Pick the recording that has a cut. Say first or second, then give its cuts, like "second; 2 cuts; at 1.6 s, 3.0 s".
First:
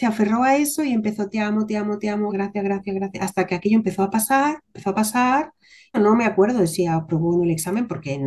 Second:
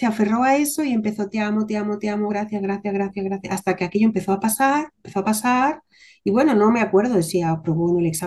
first; 2 cuts; at 2.3 s, 5.9 s